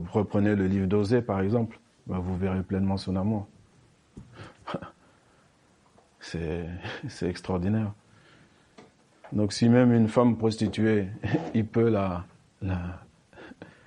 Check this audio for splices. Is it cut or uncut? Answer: uncut